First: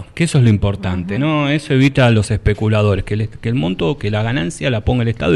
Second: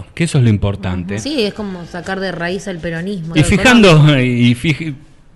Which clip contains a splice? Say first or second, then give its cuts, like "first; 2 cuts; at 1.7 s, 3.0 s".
second; 2 cuts; at 1.2 s, 3.3 s